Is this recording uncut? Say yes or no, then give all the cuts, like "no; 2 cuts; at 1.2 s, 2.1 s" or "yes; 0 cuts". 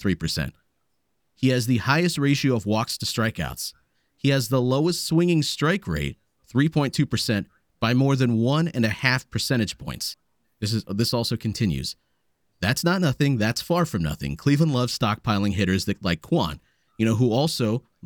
yes; 0 cuts